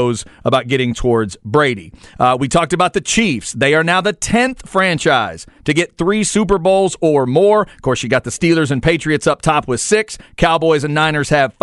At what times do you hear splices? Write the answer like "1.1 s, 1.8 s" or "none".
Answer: none